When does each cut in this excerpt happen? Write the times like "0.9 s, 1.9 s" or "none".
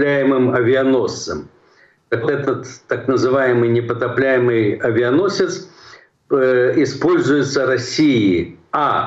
2.2 s